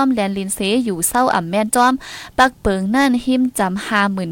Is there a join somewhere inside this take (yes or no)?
no